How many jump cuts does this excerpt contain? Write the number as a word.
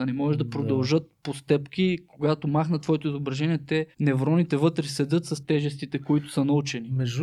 one